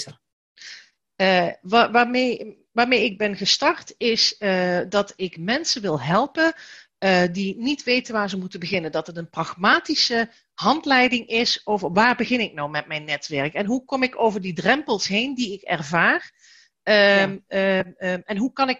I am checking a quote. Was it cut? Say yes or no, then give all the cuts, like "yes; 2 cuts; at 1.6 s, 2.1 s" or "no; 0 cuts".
no; 0 cuts